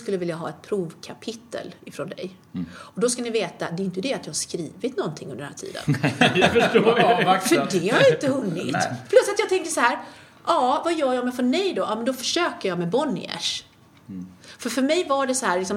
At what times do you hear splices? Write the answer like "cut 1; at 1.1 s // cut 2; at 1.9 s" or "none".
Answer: none